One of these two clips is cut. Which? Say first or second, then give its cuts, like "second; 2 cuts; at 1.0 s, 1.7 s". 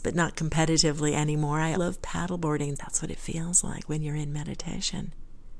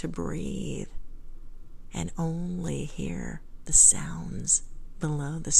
first; 2 cuts; at 1.7 s, 2.7 s